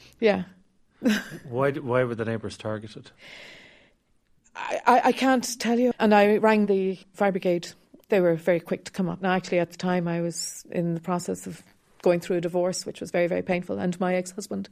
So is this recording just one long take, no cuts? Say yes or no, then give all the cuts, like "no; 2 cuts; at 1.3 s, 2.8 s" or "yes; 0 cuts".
no; 1 cut; at 5.9 s